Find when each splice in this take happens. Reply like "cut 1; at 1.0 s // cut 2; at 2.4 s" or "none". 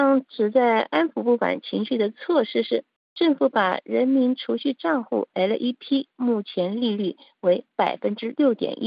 cut 1; at 5.3 s